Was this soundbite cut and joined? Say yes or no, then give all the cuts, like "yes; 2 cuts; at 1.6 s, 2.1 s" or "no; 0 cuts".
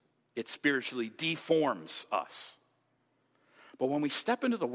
no; 0 cuts